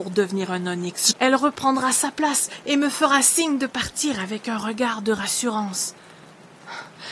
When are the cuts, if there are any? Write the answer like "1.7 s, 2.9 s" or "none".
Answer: 1.1 s